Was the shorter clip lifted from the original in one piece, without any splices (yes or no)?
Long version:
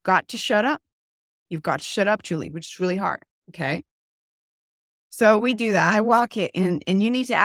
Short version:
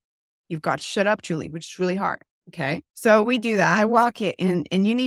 no